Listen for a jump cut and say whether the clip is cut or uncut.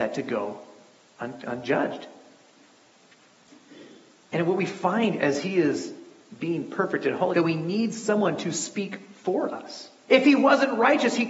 cut